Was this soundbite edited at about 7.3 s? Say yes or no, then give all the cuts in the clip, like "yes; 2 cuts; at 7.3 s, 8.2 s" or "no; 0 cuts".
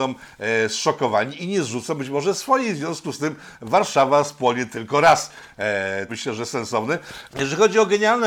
yes; 2 cuts; at 6.1 s, 7.3 s